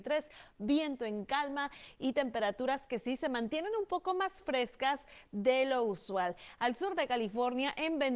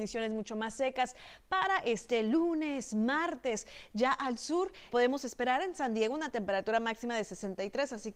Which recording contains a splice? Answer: second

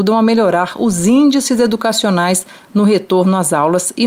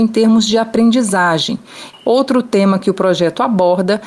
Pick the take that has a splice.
second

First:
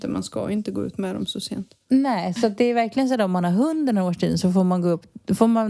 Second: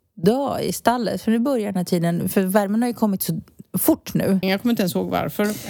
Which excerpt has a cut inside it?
second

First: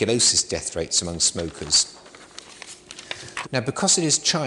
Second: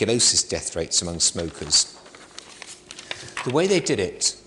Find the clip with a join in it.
first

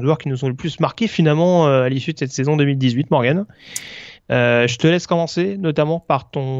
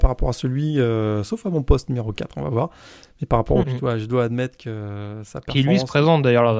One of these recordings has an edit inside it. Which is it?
second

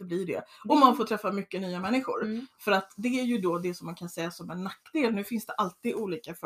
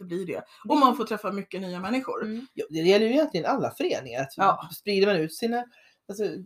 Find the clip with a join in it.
second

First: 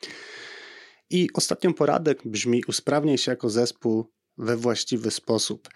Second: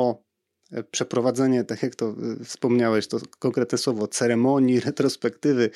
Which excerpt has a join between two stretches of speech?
first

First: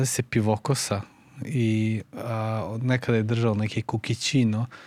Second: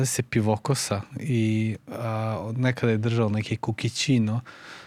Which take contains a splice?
second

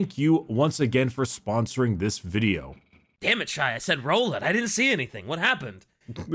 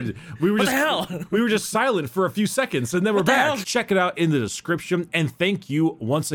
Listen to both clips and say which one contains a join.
second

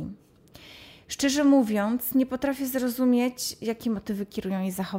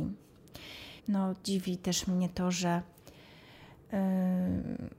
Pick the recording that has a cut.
second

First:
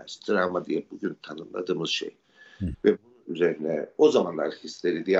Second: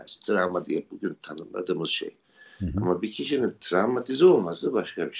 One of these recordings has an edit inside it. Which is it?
first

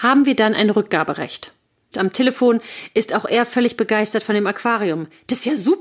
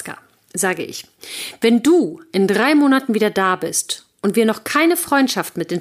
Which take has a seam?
first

